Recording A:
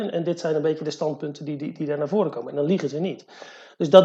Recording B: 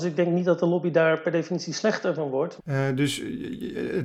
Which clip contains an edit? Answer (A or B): B